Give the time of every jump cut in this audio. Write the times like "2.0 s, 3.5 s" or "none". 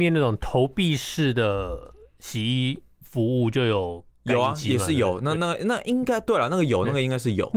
5.4 s